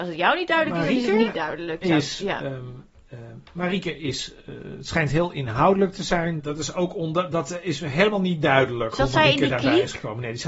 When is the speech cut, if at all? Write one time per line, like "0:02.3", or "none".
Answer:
0:06.4